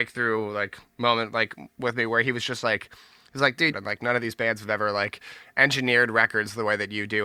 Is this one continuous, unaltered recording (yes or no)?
no